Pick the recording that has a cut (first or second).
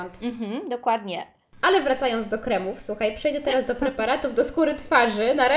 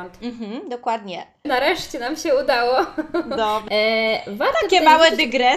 second